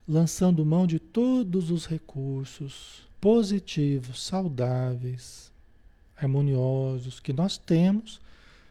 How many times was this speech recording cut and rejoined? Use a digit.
1